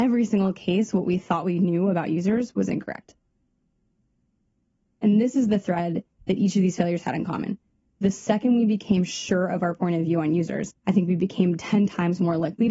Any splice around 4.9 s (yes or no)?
no